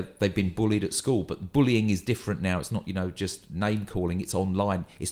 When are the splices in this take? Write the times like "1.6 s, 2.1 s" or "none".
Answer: none